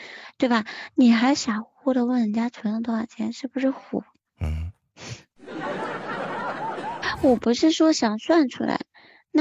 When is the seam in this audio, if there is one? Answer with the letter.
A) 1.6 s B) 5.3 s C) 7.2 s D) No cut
B